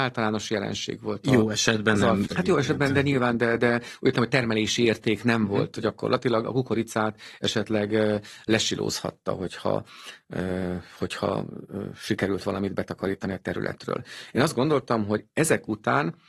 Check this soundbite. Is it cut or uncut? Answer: cut